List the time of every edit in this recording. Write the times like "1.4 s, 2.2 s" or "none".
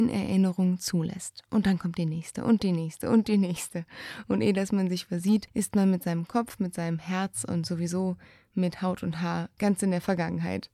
none